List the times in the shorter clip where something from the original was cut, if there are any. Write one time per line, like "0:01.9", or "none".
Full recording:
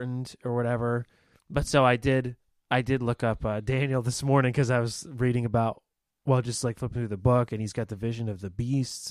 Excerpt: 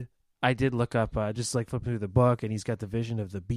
0:01.3